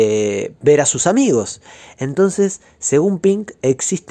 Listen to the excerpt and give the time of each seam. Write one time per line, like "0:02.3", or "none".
none

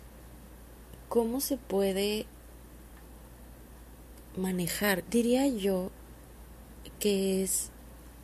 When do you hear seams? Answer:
0:05.0

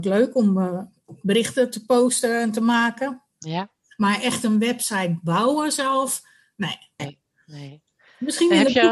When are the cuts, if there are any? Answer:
0:07.0

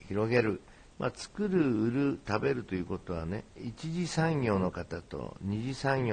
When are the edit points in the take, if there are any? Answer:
0:00.9
0:03.5

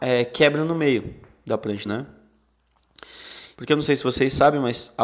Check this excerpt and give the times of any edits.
0:01.9
0:03.6

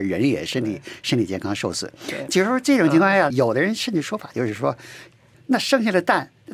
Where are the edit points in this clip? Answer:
0:02.3
0:03.3
0:05.3

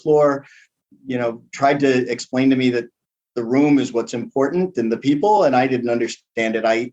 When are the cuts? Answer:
none

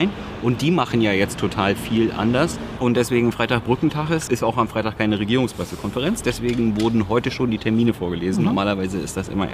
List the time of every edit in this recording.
0:02.8
0:04.3

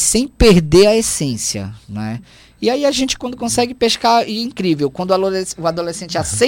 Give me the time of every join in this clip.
none

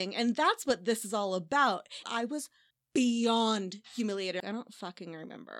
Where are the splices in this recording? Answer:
0:02.0
0:04.4

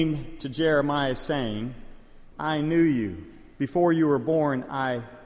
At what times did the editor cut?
0:02.3

